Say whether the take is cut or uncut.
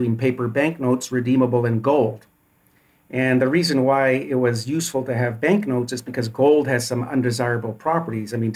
uncut